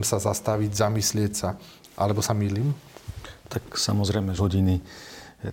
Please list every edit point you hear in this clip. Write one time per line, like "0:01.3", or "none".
0:04.4